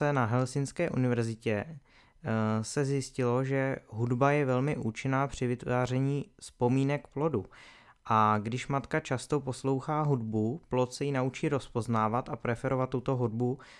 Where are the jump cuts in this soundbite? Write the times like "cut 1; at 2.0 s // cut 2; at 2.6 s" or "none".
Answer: none